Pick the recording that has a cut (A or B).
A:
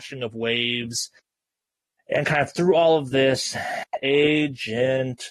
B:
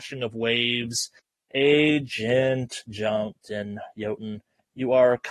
B